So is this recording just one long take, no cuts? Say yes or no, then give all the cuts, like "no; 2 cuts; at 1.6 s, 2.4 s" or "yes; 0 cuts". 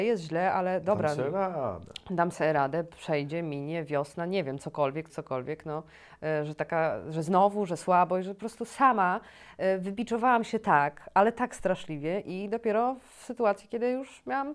no; 1 cut; at 5.1 s